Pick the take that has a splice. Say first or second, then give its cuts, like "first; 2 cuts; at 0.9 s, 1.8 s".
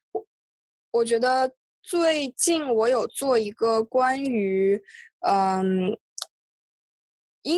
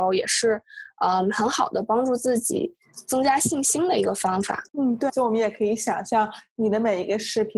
second; 1 cut; at 5.1 s